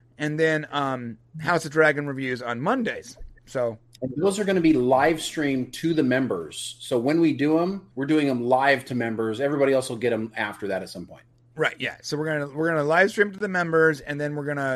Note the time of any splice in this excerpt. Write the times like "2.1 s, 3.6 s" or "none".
7.9 s